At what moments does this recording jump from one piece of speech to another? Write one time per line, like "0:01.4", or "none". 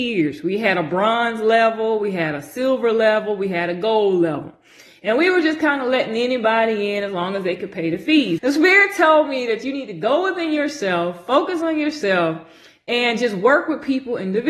0:08.4